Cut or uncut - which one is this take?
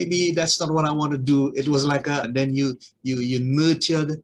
cut